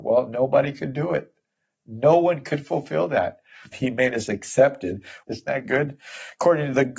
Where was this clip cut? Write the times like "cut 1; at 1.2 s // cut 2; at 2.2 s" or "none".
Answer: cut 1; at 3.7 s // cut 2; at 5.2 s